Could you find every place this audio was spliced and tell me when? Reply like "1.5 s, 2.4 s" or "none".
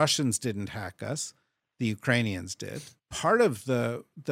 3.0 s

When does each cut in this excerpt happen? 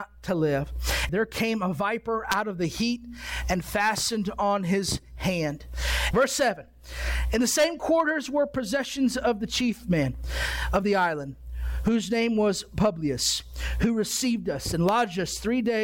1.1 s, 6.1 s

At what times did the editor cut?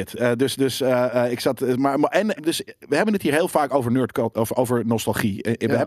2.4 s

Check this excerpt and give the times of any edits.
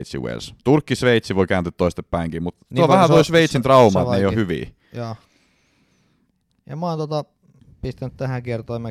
none

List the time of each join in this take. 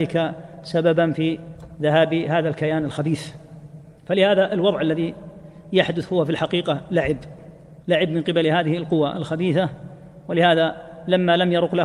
4.0 s, 7.8 s

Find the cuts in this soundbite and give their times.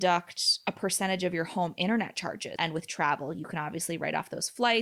2.6 s

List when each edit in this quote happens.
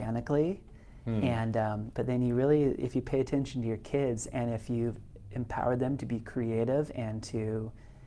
1.9 s

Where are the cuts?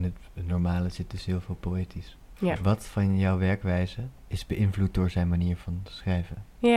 2.6 s, 4.2 s

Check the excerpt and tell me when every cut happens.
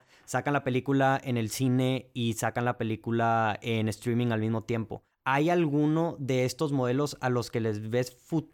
none

